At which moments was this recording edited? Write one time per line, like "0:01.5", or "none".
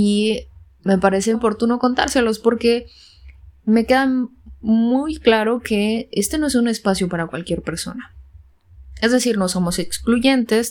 0:01.3

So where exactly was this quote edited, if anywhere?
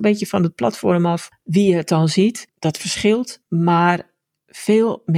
0:03.4

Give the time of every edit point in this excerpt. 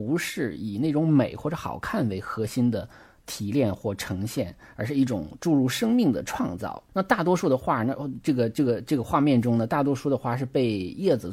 none

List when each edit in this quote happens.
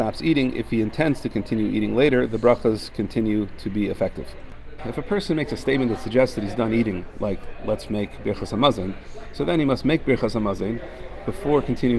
0:04.8

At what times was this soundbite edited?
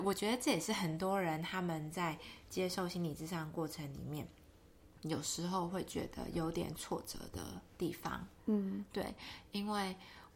none

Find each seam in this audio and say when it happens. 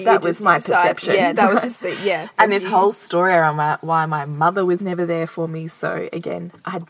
0:01.4

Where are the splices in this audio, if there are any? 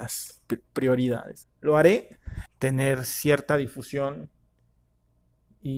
0:01.4
0:02.5

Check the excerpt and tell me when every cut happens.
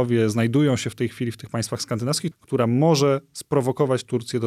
0:02.3

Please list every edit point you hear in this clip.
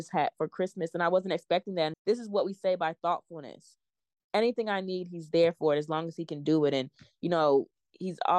0:01.9

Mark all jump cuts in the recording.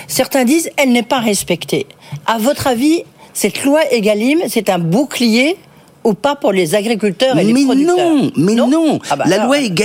0:02.2

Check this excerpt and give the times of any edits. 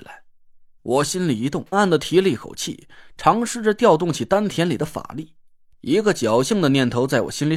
0:01.7

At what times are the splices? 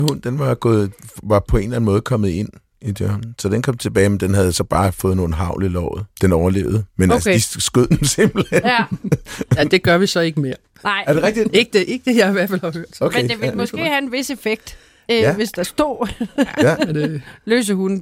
0:06.1
0:11.5

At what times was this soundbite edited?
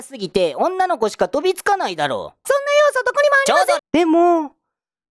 0:02.4
0:03.8

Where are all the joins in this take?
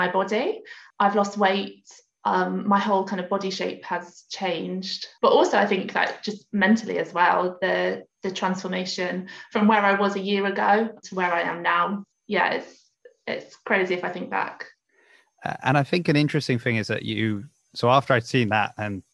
none

